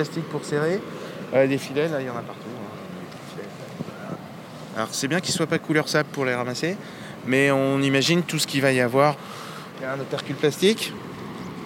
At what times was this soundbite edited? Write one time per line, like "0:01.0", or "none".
none